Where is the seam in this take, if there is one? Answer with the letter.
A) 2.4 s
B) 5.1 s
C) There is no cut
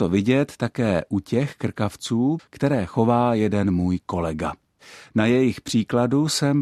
A